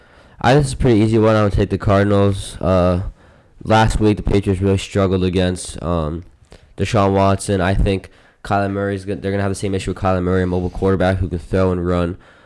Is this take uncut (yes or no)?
yes